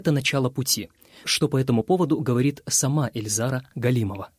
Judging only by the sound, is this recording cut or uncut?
cut